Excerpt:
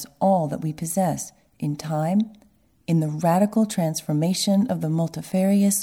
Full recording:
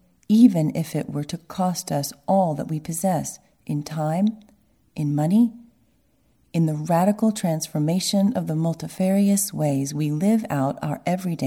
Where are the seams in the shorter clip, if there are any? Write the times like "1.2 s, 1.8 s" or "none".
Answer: 2.8 s